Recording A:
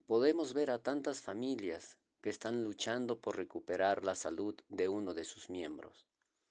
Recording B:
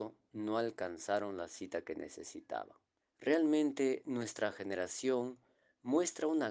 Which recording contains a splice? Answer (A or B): B